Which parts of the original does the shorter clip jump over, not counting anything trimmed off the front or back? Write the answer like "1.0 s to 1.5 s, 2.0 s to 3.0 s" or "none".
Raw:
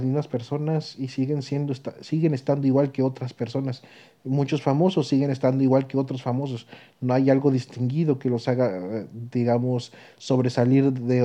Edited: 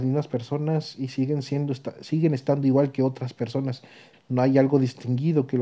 4.1 s to 6.9 s

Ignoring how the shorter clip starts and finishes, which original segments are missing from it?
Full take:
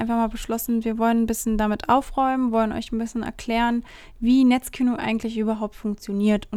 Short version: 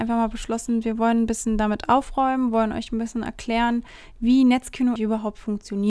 5.0 s to 5.3 s

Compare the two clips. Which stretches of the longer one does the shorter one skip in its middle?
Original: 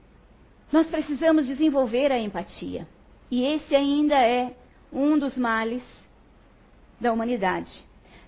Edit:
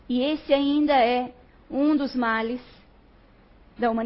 none

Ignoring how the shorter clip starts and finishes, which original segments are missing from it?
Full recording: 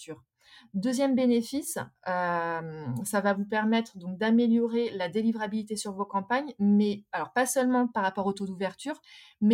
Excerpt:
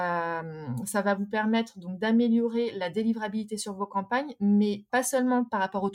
7.1 s to 7.3 s

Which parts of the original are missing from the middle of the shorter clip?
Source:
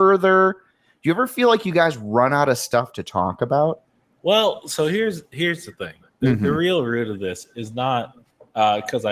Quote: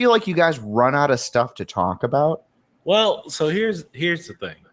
none

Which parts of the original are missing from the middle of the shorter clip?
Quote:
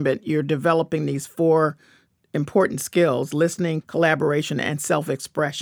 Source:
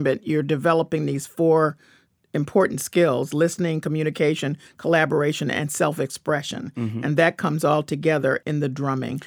3.8 s to 4.7 s

